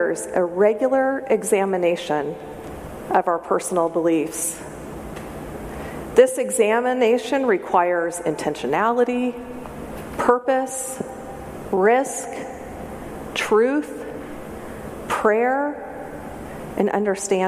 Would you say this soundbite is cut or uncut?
uncut